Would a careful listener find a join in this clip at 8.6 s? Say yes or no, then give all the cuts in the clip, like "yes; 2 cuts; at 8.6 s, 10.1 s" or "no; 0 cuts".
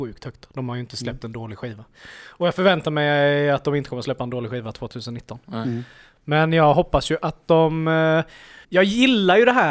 yes; 1 cut; at 8.6 s